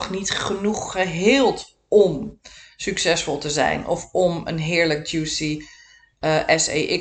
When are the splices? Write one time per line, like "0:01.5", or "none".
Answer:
none